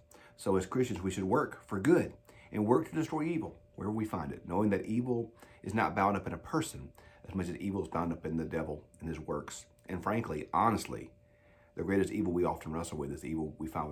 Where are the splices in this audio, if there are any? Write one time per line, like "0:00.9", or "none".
none